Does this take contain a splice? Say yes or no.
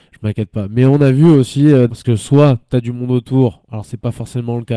yes